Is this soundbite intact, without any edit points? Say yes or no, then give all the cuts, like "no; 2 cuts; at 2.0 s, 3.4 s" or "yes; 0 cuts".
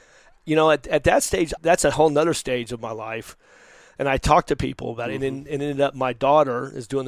no; 1 cut; at 1.6 s